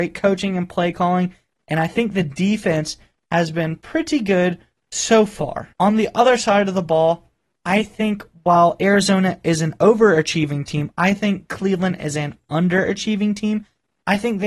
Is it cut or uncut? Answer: cut